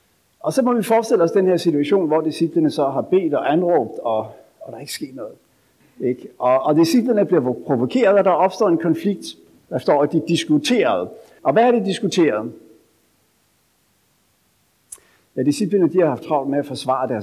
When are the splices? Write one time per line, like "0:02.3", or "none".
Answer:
0:05.8
0:11.4